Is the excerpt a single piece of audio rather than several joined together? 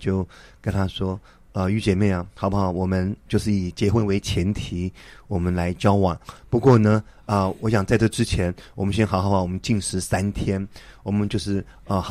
yes; 0 cuts

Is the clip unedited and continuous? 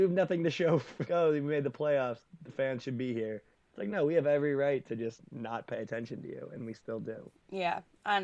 no; 1 cut; at 1.1 s

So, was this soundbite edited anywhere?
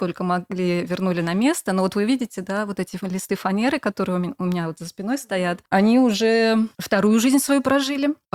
no; 0 cuts

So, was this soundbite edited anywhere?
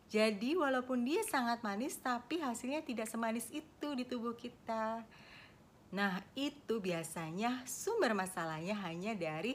yes; 1 cut; at 5.8 s

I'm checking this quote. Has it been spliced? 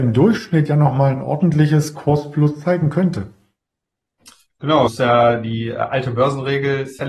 yes; 1 cut; at 4.9 s

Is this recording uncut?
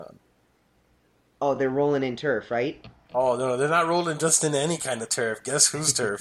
yes; 0 cuts

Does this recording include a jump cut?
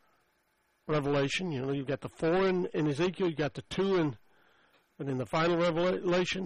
yes; 1 cut; at 4.9 s

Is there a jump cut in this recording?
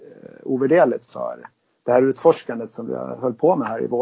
no; 0 cuts

